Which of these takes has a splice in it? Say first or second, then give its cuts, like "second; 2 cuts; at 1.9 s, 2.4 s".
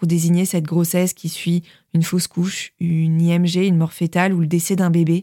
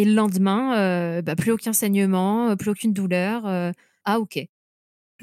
second; 1 cut; at 4.0 s